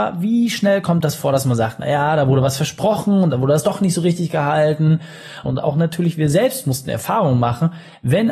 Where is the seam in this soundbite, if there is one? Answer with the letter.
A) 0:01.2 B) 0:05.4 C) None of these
B